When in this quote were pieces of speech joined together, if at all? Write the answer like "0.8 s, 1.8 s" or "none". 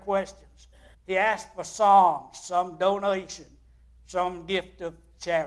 0.9 s